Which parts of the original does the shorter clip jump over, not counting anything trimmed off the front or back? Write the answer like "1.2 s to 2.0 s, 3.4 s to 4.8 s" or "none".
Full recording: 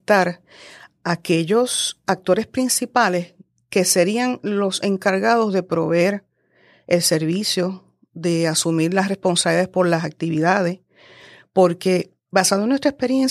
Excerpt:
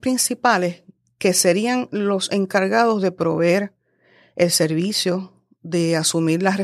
none